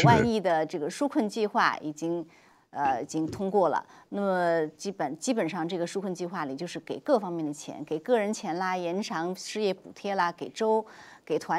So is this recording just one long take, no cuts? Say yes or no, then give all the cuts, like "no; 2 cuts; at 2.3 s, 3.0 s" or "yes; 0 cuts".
yes; 0 cuts